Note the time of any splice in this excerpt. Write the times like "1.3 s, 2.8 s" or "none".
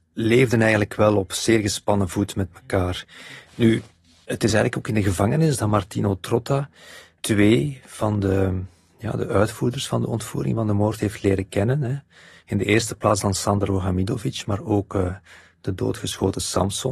none